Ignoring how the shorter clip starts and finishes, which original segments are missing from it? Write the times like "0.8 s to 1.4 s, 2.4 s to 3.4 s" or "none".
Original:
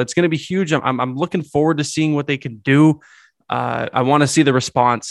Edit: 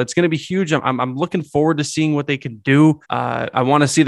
3.0 s to 3.4 s